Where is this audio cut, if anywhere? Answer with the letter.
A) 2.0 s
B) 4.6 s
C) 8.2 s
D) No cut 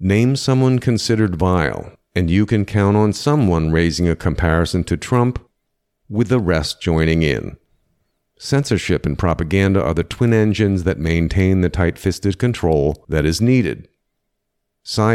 C